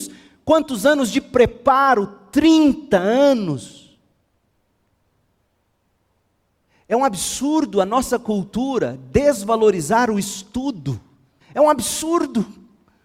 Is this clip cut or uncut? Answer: cut